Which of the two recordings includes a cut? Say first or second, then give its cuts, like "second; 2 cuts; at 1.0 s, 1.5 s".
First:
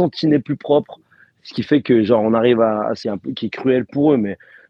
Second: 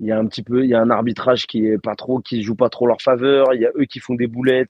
first; 1 cut; at 3.0 s